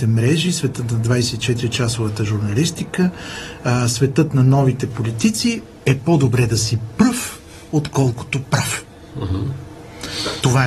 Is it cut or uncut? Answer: uncut